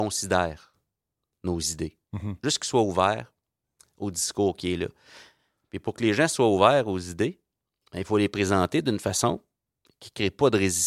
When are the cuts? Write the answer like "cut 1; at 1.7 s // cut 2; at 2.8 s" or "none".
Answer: none